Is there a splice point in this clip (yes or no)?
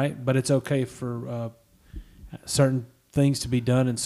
no